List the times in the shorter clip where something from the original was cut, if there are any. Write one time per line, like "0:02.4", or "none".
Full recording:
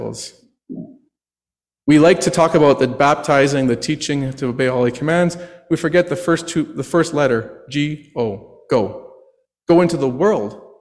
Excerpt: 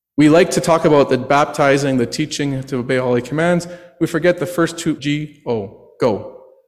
0:05.0